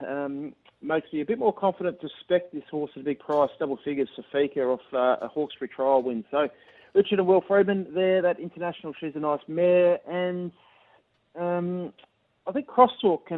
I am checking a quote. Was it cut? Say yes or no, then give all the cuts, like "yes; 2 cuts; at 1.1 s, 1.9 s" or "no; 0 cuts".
no; 0 cuts